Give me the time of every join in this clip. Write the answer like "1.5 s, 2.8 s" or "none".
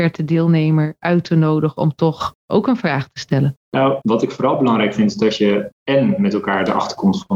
4.0 s